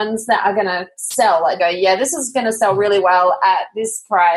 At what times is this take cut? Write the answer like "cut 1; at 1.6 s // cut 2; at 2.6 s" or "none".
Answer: cut 1; at 1.6 s